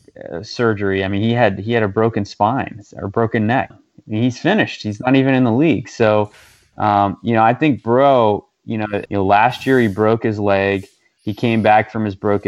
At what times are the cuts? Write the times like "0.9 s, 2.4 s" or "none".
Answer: 3.7 s, 9.1 s